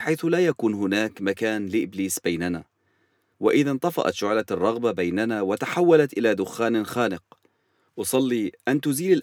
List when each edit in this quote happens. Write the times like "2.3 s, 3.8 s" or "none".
none